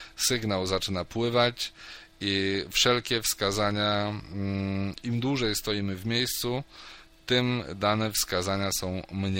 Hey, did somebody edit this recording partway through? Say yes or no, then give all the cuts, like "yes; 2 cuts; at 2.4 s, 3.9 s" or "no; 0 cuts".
no; 0 cuts